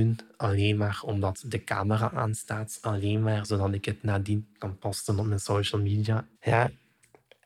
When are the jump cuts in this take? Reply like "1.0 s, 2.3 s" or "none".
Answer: 6.3 s